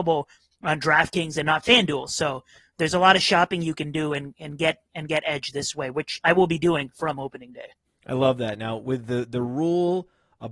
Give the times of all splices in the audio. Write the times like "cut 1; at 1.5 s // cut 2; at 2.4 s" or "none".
none